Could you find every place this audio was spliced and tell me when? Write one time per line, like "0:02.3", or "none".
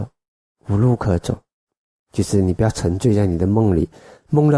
none

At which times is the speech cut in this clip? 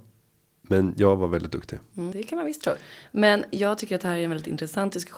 0:02.1

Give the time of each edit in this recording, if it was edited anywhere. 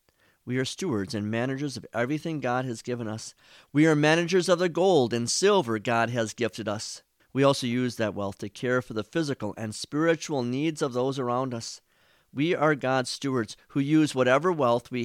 0:07.2

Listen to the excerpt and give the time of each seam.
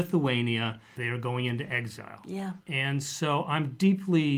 0:01.0
0:02.6

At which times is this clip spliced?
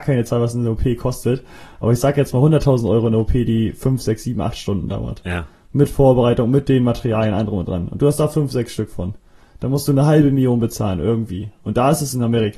none

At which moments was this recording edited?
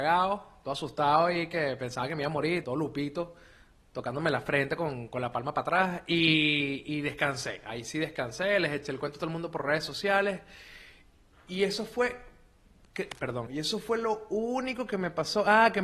0:02.6
0:13.5

